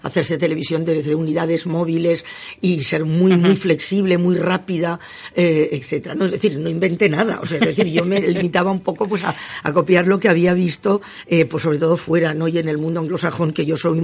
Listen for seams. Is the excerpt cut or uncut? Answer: uncut